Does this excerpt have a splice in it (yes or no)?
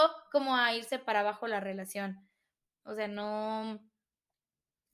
no